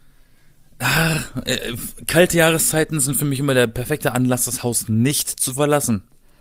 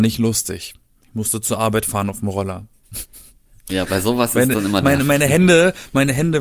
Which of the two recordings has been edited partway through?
second; 1 cut; at 3.9 s

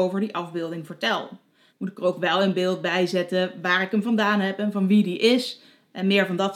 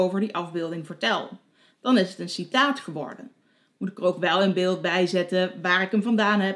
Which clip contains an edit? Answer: first; 1 cut; at 1.7 s

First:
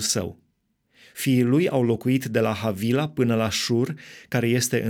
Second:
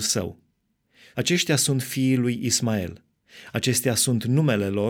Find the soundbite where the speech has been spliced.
second; 1 cut; at 1.1 s

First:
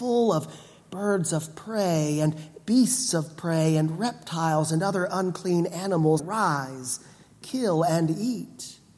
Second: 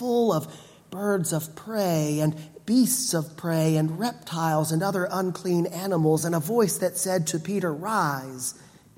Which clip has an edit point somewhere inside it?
first; 1 cut; at 6.2 s

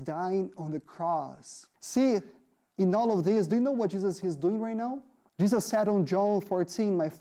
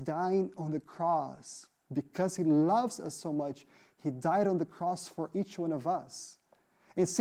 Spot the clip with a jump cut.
first; 2 cuts; at 1.7 s, 5.3 s

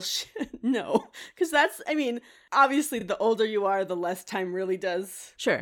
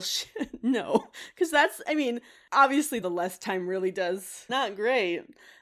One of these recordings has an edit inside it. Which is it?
second; 2 cuts; at 3.0 s, 4.5 s

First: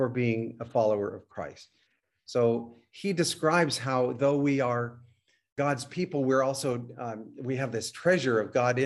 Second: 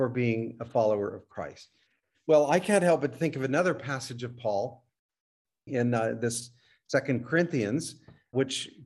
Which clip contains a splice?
second; 1 cut; at 2.1 s

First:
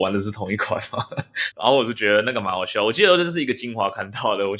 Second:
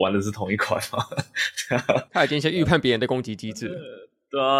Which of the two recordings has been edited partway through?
first; 1 cut; at 1.5 s

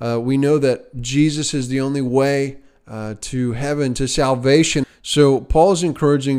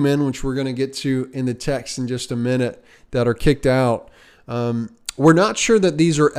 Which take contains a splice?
first; 1 cut; at 4.8 s

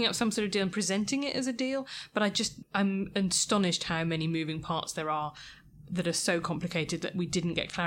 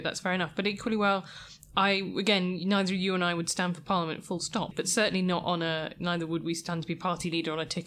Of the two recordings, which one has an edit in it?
second; 1 cut; at 4.7 s

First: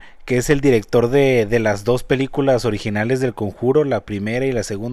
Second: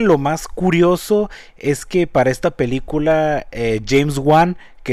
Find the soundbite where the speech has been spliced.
second; 1 cut; at 3.8 s

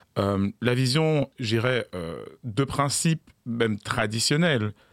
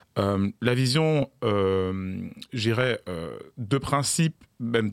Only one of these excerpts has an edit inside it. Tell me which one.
first; 1 cut; at 1.3 s

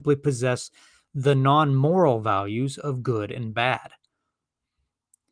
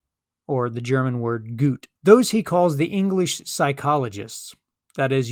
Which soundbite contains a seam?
second; 1 cut; at 1.9 s

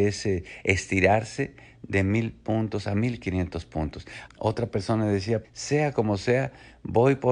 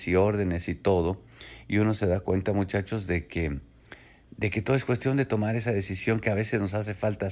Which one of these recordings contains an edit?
first; 2 cuts; at 4.3 s, 5.4 s

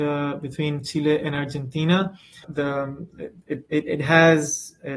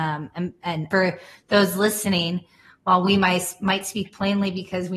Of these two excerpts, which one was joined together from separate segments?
second; 1 cut; at 0.9 s

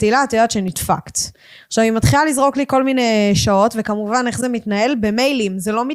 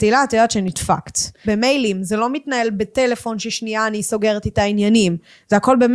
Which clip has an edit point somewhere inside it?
second; 1 cut; at 1.4 s

